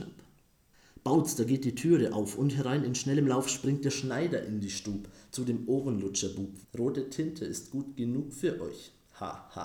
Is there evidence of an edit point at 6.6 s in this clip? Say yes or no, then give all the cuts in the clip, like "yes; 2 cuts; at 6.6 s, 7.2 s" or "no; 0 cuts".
yes; 1 cut; at 6.6 s